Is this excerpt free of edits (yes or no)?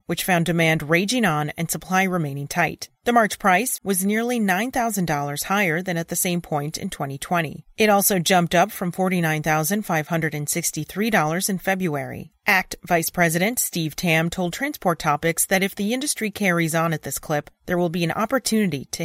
no